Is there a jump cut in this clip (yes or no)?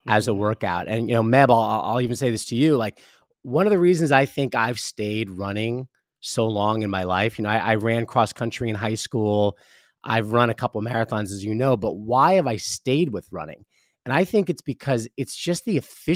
no